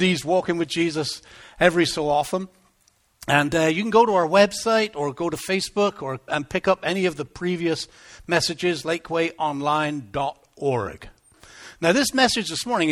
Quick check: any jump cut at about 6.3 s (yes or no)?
yes